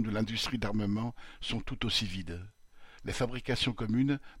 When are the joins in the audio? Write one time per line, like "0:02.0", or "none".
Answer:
0:03.0